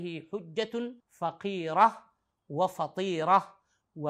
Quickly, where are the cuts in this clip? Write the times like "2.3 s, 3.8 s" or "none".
1.0 s